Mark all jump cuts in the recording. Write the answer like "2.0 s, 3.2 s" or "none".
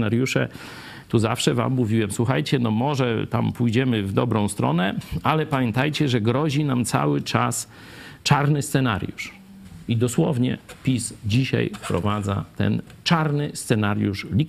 none